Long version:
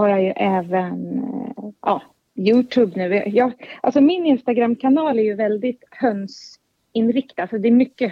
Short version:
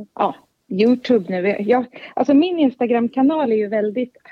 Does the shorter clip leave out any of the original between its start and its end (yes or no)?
no